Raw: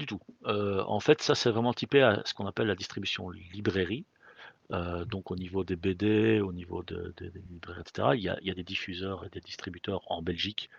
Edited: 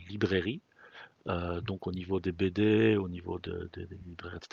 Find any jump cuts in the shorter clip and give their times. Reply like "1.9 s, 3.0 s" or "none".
none